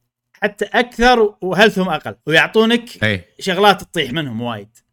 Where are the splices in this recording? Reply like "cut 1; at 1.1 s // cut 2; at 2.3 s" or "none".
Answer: cut 1; at 2.2 s